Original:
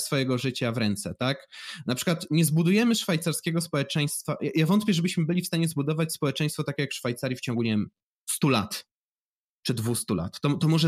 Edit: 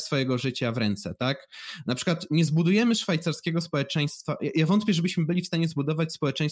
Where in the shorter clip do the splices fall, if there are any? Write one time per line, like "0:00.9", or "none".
none